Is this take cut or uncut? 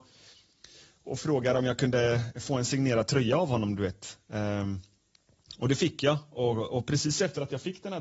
uncut